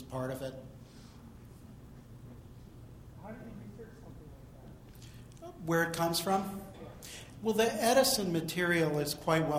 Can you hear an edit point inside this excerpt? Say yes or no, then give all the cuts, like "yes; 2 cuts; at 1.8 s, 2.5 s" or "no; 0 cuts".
no; 0 cuts